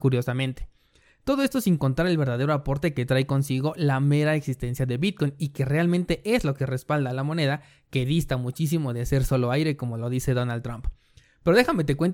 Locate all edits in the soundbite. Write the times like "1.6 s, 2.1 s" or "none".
none